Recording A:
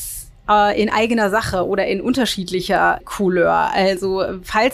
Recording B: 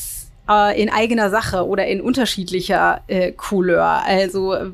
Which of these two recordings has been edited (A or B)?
A